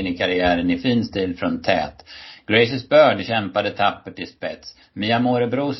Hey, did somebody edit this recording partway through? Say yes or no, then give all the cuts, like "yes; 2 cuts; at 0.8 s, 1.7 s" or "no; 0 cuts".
no; 0 cuts